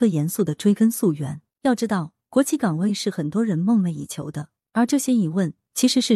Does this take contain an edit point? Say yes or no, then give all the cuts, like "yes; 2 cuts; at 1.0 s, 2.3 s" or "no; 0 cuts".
yes; 2 cuts; at 1.5 s, 4.6 s